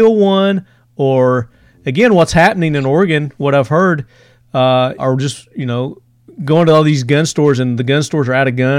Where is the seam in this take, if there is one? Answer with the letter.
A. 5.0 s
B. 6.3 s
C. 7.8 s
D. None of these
A